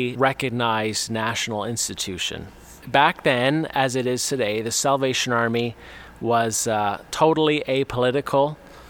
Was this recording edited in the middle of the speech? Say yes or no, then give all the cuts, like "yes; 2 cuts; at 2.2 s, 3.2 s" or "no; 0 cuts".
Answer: no; 0 cuts